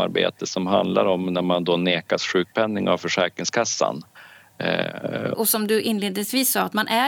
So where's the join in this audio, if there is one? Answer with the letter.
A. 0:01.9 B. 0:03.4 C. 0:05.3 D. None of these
C